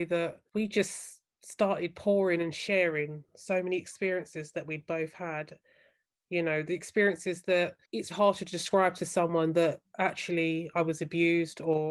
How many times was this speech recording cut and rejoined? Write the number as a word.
two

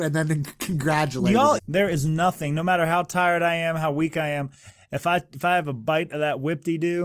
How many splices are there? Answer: one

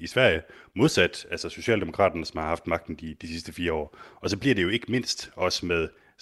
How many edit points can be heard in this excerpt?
zero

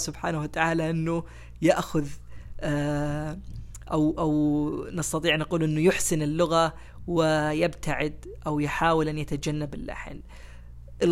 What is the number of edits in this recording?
zero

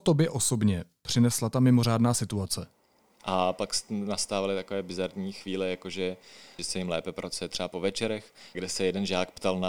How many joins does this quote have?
three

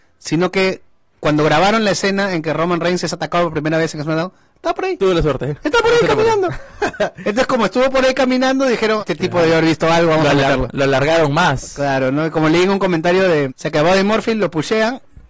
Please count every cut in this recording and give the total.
two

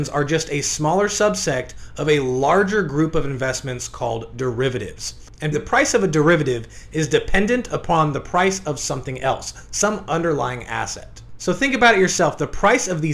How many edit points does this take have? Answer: one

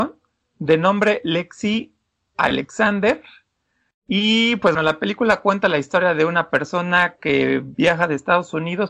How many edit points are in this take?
one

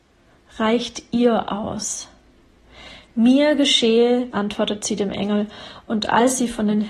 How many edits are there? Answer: one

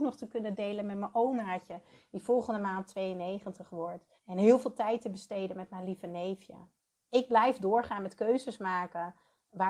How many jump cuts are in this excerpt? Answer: one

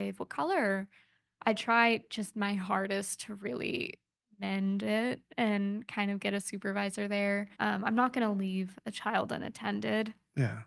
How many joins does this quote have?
one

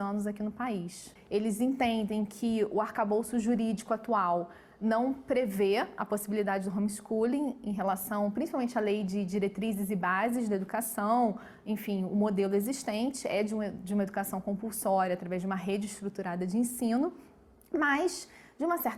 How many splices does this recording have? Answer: one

